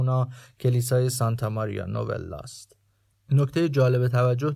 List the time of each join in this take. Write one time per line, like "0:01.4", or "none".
0:03.1